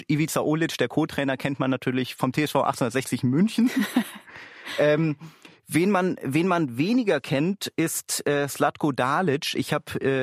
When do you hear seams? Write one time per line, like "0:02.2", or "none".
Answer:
none